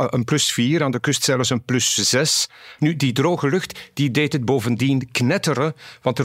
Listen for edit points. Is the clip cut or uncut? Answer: cut